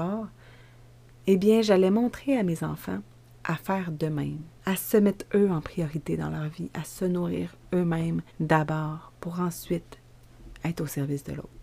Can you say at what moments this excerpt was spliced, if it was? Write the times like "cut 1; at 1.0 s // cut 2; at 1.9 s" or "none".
cut 1; at 4.6 s // cut 2; at 8.3 s